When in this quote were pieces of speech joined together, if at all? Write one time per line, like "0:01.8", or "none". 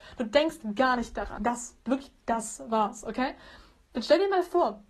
0:01.4

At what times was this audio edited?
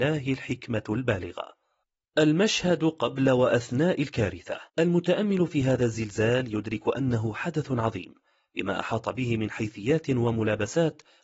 0:04.7

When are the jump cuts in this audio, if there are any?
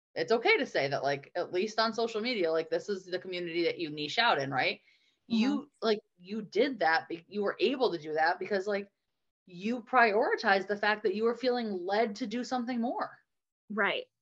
none

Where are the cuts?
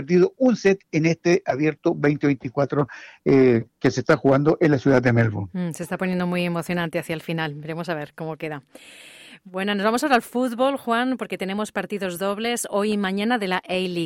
none

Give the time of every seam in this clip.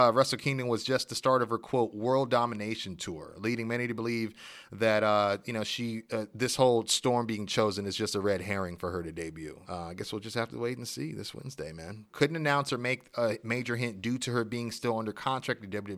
0:09.6
0:12.1

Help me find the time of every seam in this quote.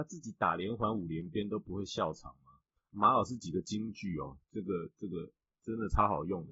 0:02.8

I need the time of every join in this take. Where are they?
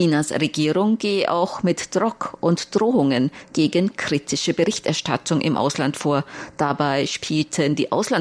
none

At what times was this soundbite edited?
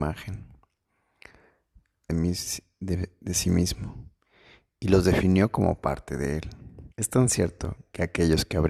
0:02.1
0:06.9

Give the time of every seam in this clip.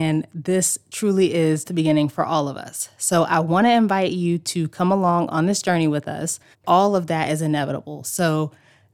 0:01.6
0:06.5

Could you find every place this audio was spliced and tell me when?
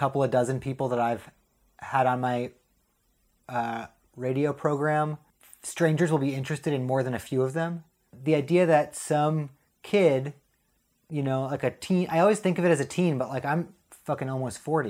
none

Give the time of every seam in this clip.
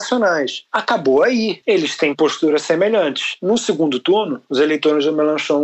0:01.6

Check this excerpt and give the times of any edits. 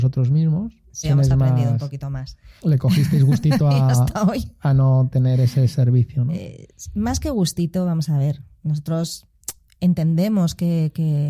0:01.0
0:02.6

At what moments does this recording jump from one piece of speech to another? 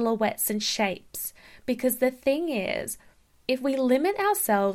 none

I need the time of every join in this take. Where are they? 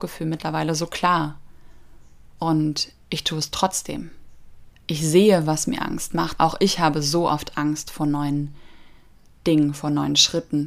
0:03.0
0:04.7
0:06.4

